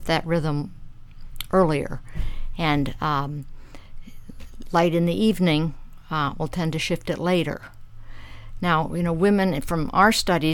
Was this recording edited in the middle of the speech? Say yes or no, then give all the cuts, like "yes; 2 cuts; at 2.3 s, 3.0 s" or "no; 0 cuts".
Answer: no; 0 cuts